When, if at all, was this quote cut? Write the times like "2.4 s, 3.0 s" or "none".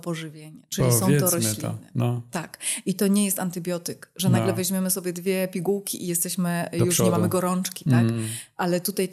none

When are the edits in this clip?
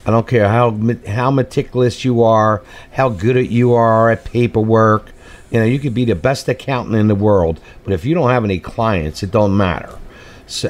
none

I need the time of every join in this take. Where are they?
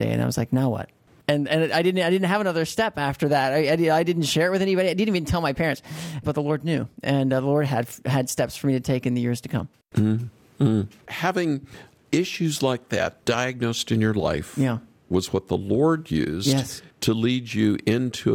1.1 s, 16.9 s

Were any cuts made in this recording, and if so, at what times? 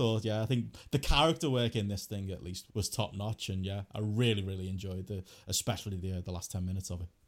2.7 s

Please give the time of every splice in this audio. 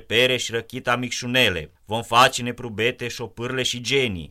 1.8 s

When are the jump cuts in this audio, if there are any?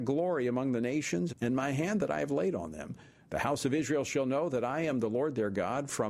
1.3 s

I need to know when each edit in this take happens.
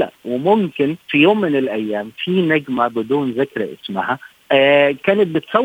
1.0 s

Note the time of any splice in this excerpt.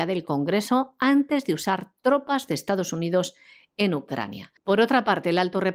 4.6 s

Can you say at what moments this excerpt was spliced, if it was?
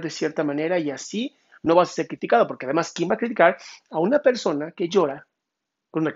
none

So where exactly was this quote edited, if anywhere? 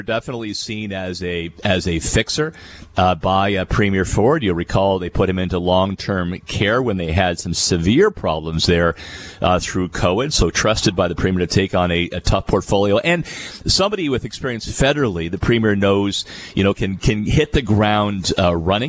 none

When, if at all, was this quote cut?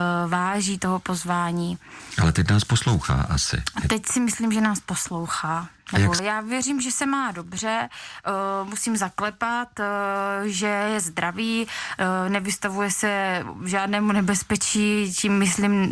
6.2 s

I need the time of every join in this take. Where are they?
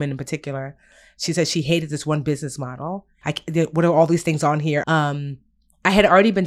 3.2 s, 4.8 s

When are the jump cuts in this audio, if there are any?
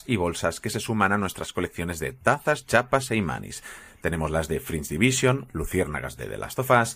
none

